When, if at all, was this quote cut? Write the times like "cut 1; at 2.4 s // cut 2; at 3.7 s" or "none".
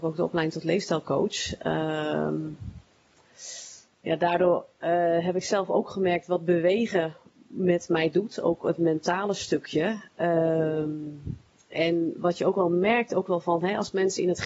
none